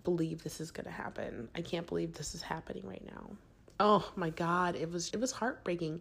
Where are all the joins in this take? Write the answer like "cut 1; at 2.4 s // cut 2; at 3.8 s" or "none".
cut 1; at 3.7 s // cut 2; at 5.1 s